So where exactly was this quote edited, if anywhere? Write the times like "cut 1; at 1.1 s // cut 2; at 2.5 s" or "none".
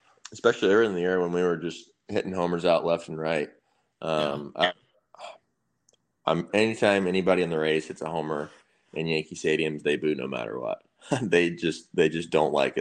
cut 1; at 6.5 s